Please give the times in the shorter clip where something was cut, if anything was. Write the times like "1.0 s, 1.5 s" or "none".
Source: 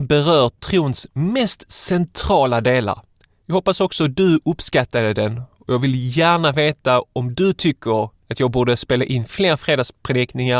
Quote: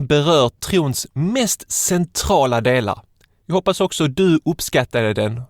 none